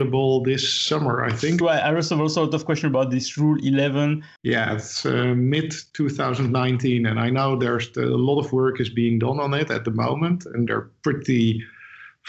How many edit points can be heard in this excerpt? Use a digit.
3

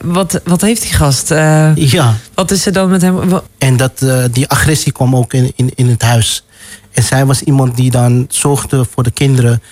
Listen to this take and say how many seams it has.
1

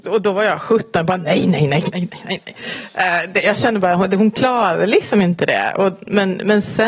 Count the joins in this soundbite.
1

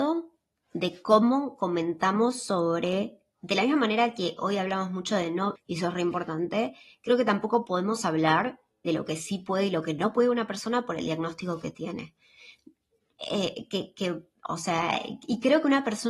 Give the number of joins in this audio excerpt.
1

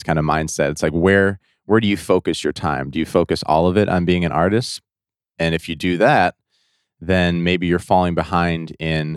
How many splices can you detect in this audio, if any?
0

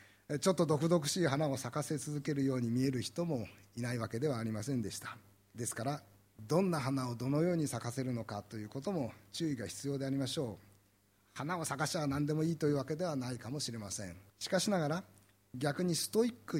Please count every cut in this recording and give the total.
2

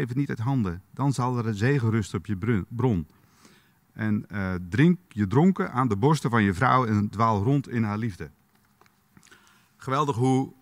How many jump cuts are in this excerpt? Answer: 0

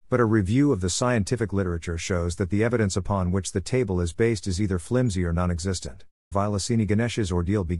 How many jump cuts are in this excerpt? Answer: 1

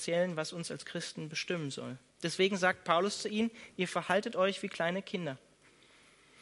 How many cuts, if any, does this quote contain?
1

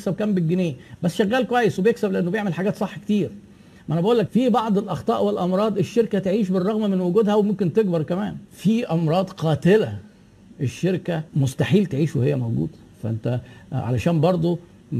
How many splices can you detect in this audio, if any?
2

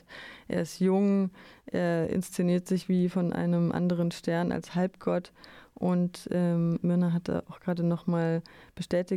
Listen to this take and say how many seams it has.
0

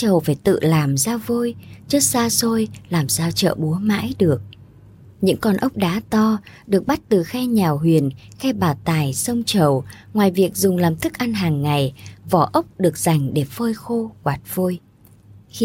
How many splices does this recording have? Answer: 0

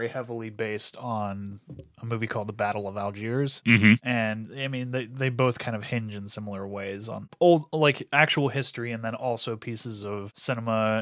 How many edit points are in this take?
0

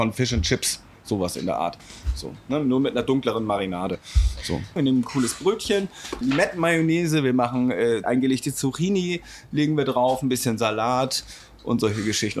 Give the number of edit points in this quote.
3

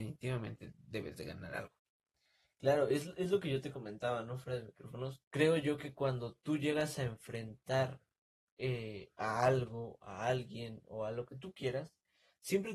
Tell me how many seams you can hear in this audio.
1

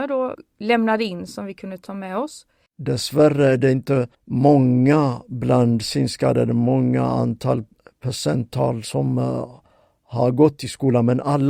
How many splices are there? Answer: 2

